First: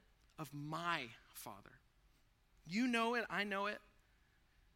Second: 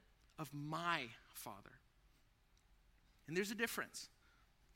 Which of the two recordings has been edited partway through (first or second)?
first